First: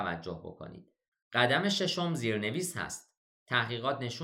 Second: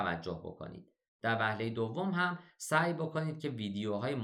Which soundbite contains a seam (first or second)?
first